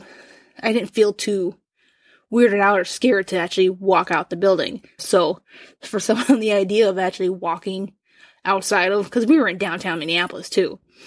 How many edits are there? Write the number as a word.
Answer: one